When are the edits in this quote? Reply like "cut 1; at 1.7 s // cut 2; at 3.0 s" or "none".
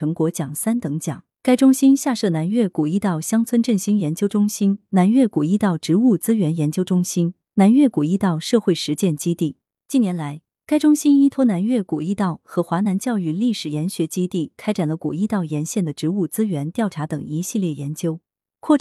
cut 1; at 1.4 s